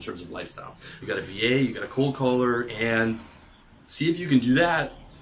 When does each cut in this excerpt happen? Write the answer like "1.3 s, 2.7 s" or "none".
1.0 s, 2.7 s